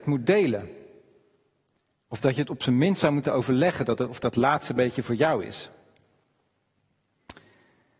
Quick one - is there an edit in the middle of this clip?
no; 0 cuts

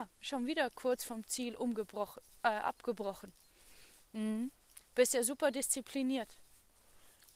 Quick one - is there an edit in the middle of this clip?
no; 0 cuts

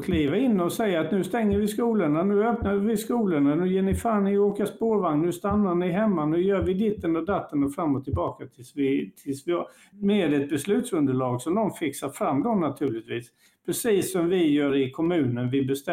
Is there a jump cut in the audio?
yes; 1 cut; at 9.9 s

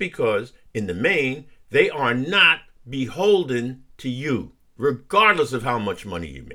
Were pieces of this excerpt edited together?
yes; 1 cut; at 4.8 s

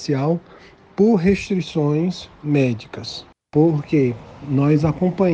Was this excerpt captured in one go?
no; 1 cut; at 3.3 s

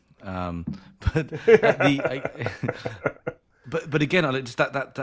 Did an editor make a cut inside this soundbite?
no; 0 cuts

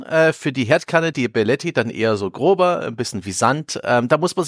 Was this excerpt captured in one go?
yes; 0 cuts

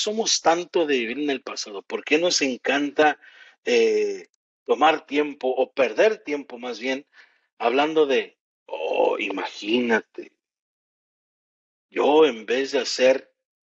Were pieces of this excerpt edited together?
no; 0 cuts

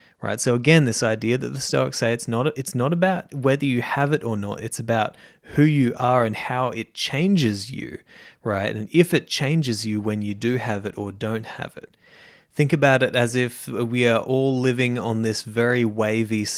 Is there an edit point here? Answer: no; 0 cuts

